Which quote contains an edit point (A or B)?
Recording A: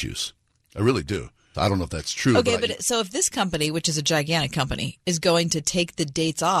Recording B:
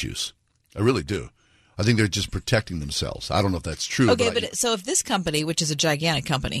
A